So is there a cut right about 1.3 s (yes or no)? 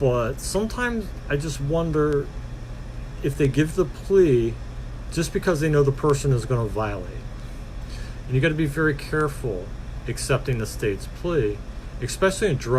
no